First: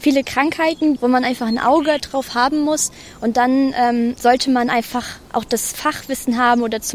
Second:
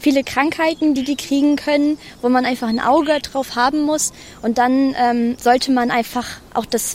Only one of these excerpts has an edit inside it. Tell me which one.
first; 1 cut; at 1.0 s

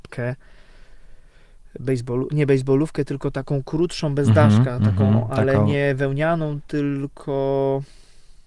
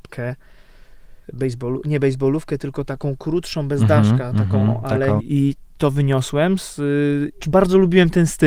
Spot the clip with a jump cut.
second; 3 cuts; at 1.2 s, 5.2 s, 7.4 s

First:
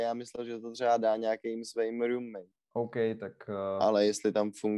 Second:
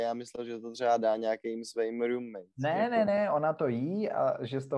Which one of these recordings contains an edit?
first; 1 cut; at 2.5 s

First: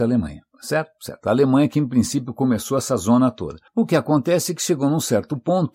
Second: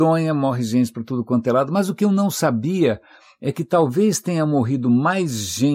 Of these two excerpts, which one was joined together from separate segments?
first; 1 cut; at 3.7 s

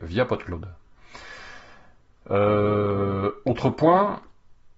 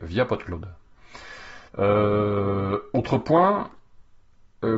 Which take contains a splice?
second; 1 cut; at 1.7 s

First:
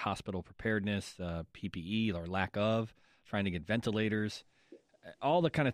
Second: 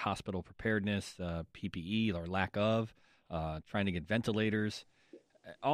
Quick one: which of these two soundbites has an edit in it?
first; 1 cut; at 3.2 s

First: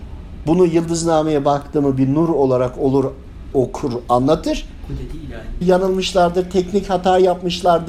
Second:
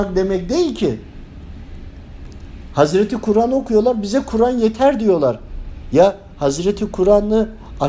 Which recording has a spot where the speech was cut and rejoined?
first; 2 cuts; at 3.5 s, 5.6 s

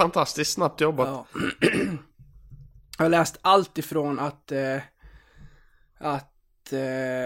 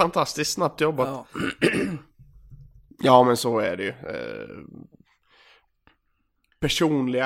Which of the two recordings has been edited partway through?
second; 1 cut; at 2.9 s

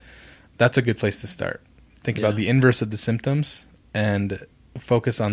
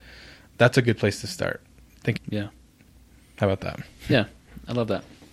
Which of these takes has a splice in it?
second; 1 cut; at 2.2 s

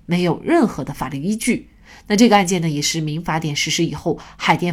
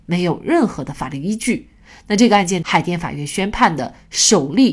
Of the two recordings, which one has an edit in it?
second; 1 cut; at 2.6 s

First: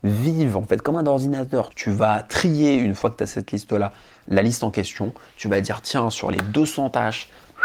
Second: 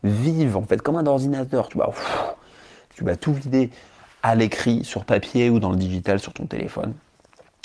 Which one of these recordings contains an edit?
first; 1 cut; at 1.7 s

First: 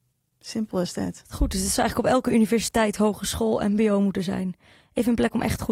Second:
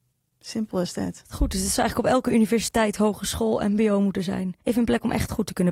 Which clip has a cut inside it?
second; 1 cut; at 4.6 s

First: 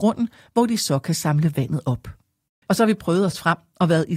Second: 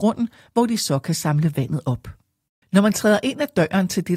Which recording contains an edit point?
first; 1 cut; at 2.7 s

